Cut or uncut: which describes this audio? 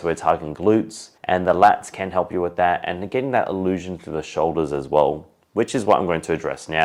cut